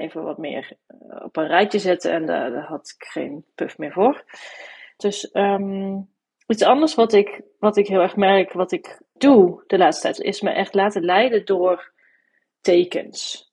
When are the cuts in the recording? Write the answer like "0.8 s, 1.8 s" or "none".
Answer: 5.0 s, 9.2 s, 10.2 s